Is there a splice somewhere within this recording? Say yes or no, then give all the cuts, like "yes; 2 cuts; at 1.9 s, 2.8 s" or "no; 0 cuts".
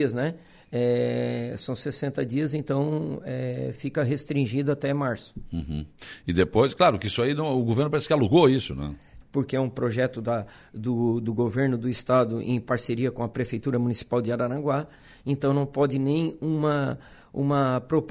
yes; 1 cut; at 9.2 s